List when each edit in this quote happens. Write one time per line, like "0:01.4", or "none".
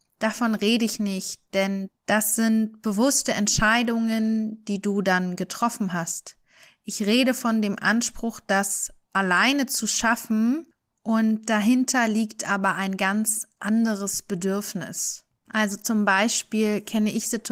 none